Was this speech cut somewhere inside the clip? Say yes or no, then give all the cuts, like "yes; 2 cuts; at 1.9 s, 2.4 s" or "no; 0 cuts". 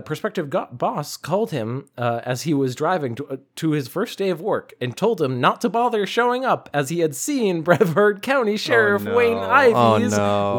no; 0 cuts